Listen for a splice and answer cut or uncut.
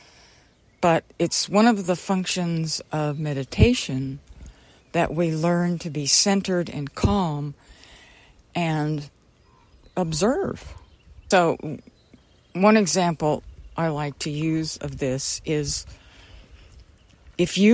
cut